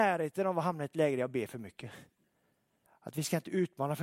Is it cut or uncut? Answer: cut